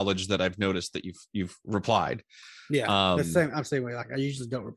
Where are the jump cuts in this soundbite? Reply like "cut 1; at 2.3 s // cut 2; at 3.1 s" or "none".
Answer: none